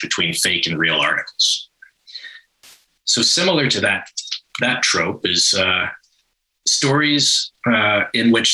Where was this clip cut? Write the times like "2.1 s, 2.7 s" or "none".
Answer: 3.0 s